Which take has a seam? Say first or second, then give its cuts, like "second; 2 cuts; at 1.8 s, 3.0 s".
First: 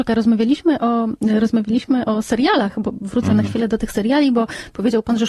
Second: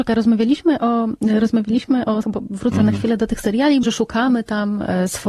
second; 2 cuts; at 2.2 s, 3.8 s